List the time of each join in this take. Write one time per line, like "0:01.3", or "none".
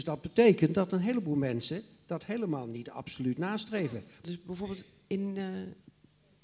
0:04.2